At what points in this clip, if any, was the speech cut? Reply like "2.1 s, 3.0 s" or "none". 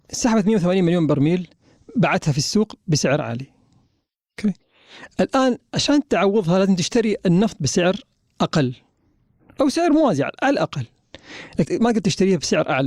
11.6 s